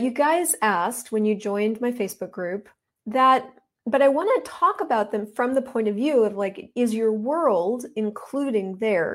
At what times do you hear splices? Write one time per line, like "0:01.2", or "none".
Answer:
none